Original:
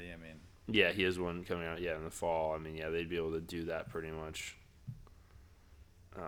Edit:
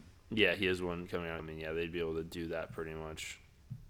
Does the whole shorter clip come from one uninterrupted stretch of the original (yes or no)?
no